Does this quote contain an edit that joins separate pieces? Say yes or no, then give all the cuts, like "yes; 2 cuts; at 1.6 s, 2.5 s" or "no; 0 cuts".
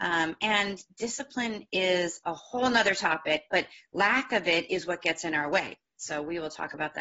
no; 0 cuts